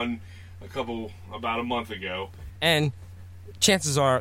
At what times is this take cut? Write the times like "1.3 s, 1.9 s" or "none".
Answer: 2.5 s